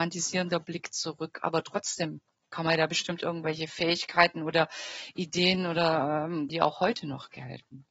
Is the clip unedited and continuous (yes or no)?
no